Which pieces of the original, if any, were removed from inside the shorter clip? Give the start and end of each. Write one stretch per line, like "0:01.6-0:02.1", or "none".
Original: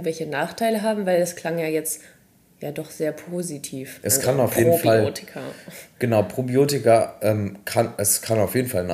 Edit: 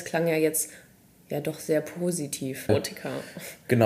0:04.0-0:05.0